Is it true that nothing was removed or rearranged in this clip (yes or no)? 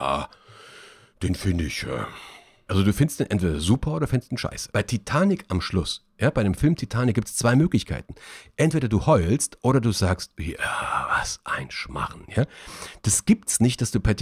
no